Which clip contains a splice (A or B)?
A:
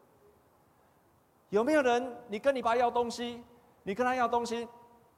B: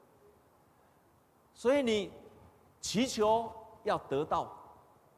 A